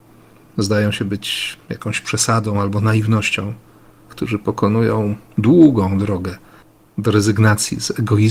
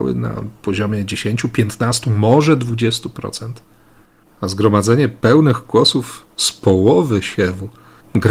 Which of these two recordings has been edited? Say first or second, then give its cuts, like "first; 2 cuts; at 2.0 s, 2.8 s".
first; 1 cut; at 4.1 s